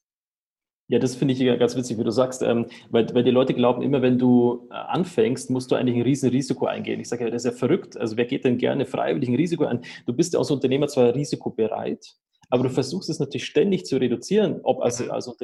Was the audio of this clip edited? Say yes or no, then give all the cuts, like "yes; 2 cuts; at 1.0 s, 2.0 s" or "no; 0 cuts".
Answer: no; 0 cuts